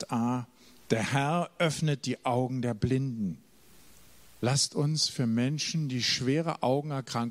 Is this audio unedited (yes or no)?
no